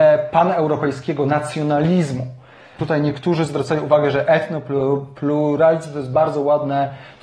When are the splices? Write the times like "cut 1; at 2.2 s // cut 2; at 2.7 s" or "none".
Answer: cut 1; at 2.8 s